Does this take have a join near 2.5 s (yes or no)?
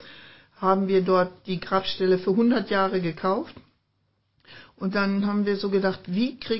no